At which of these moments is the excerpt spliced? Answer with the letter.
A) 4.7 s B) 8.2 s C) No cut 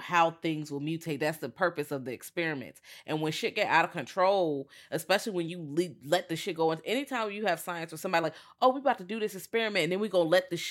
C